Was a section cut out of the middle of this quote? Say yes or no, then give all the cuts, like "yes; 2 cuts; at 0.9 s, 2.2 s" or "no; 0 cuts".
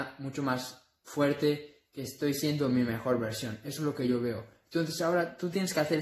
no; 0 cuts